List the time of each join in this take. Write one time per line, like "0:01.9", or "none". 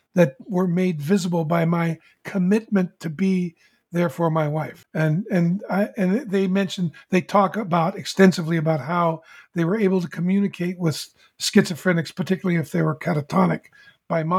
0:04.8